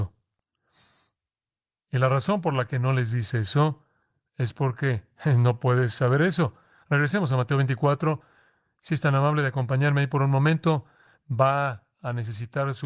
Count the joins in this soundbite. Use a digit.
0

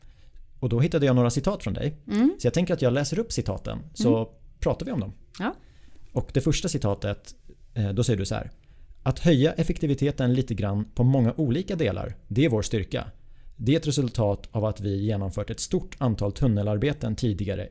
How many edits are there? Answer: 0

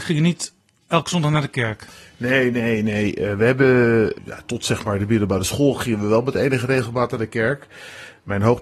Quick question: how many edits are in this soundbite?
1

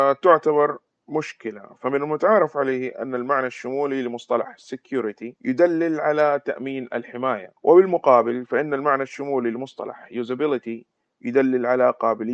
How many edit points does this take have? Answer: 2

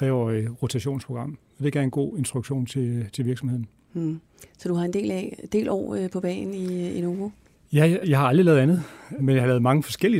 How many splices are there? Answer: 2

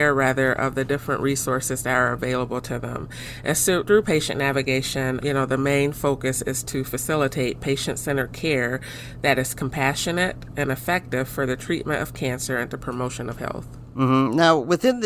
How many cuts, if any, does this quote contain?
3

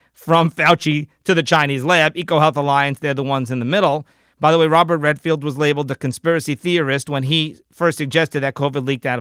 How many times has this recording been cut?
0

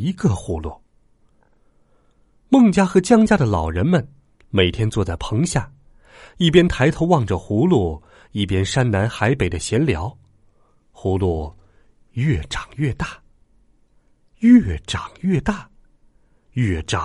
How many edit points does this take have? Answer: 0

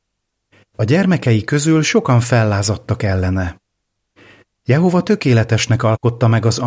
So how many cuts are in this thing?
0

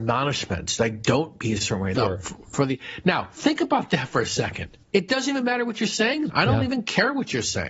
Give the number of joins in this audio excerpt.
3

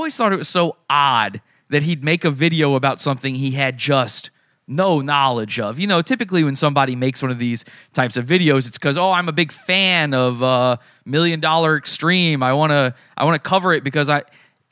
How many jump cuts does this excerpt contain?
0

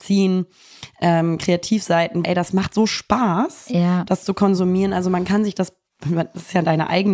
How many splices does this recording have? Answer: 1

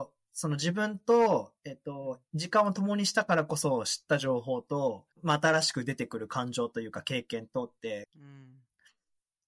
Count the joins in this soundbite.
2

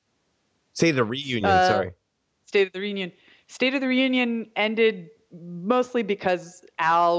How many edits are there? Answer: 0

